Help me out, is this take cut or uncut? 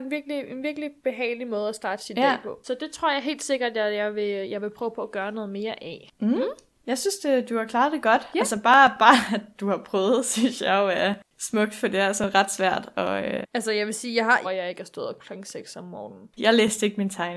cut